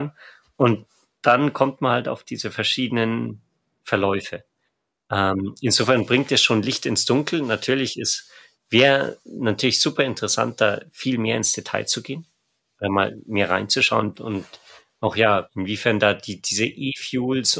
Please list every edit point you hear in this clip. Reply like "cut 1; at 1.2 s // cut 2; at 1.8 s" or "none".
cut 1; at 14.1 s